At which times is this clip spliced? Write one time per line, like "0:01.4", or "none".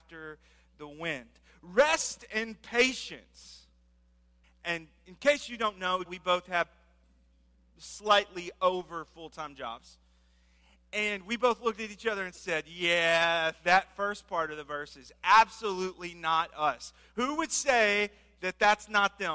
0:04.4
0:06.1